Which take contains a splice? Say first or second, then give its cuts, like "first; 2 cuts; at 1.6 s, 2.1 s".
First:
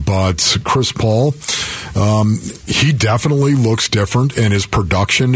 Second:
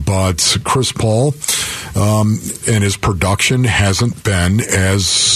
second; 1 cut; at 2.6 s